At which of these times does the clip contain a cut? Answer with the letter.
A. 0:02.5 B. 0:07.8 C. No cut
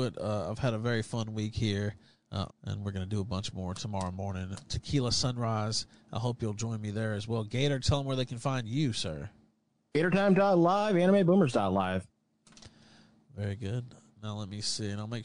A